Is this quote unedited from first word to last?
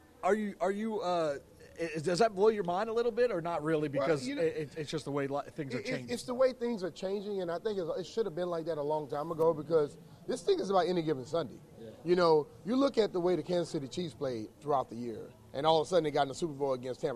yes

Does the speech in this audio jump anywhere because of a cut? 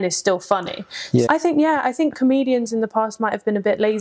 yes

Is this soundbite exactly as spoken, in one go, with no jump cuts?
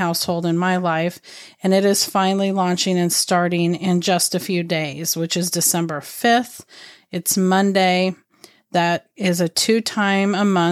yes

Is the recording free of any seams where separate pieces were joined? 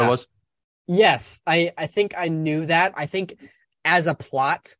no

